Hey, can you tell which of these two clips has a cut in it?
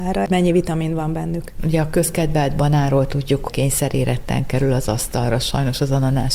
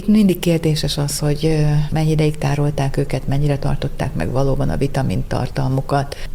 first; 2 cuts; at 1.6 s, 3.5 s

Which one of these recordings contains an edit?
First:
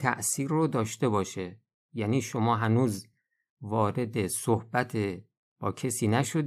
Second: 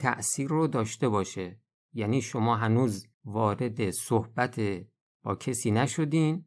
second; 1 cut; at 3.1 s

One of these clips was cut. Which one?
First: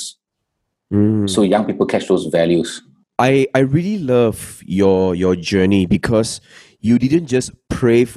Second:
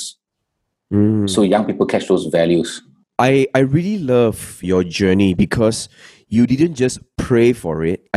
second; 1 cut; at 4.6 s

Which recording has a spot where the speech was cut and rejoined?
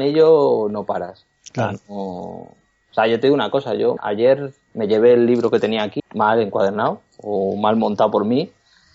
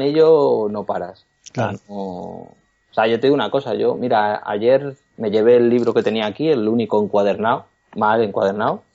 first; 2 cuts; at 4.0 s, 6.0 s

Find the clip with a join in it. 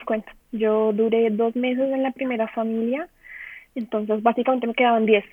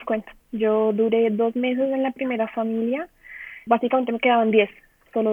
second; 1 cut; at 3.7 s

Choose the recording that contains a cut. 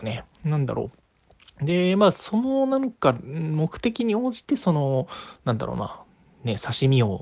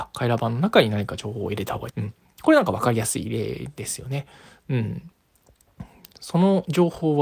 second; 1 cut; at 1.9 s

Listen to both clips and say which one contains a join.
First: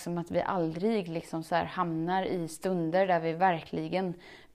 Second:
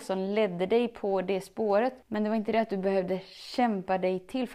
second; 1 cut; at 2.0 s

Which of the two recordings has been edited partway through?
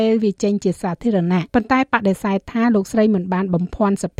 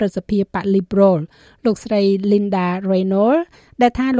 first; 1 cut; at 1.5 s

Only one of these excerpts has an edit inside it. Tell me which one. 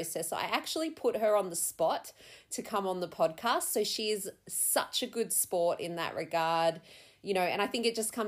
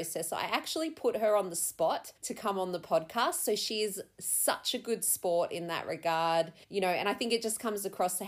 second; 2 cuts; at 2.2 s, 6.6 s

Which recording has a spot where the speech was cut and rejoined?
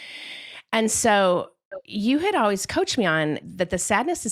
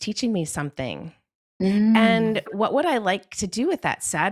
first; 1 cut; at 3.4 s

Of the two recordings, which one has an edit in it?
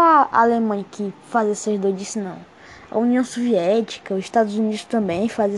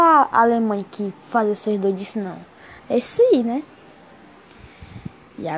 second; 1 cut; at 2.8 s

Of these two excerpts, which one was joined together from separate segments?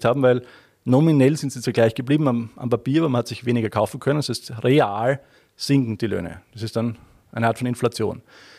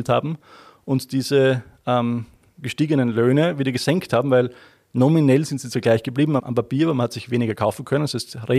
second; 1 cut; at 6.4 s

